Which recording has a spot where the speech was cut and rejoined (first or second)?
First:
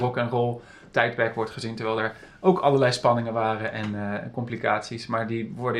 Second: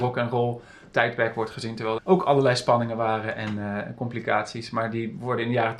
second